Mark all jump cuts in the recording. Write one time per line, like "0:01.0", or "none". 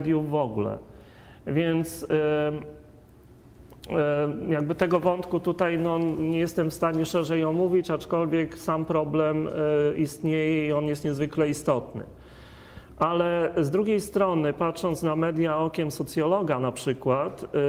none